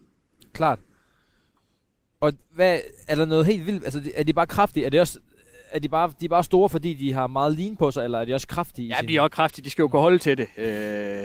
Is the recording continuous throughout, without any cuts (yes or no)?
yes